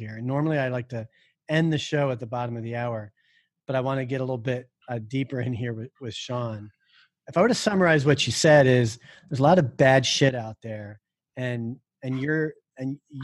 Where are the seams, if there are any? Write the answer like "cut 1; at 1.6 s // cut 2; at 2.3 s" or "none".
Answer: none